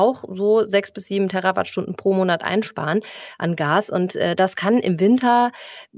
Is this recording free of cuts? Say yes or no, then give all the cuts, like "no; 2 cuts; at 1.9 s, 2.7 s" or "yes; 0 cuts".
yes; 0 cuts